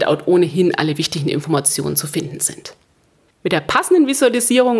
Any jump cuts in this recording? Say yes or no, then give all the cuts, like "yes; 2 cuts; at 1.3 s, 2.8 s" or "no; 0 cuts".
yes; 1 cut; at 3.3 s